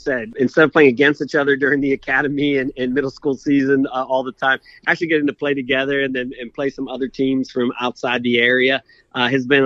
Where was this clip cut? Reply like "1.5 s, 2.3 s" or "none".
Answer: none